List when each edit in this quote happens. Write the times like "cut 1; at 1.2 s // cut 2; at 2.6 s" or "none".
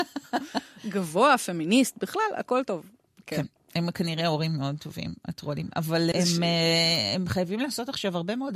cut 1; at 6.1 s